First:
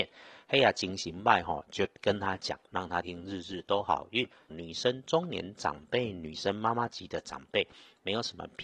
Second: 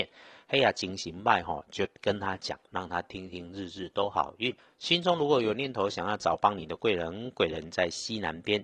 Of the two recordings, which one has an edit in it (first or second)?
first